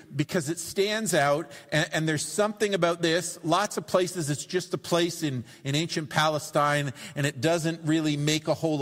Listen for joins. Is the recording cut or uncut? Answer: uncut